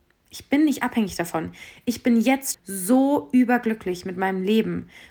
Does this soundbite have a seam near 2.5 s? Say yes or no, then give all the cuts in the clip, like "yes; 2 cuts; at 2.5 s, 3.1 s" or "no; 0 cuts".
yes; 1 cut; at 2.5 s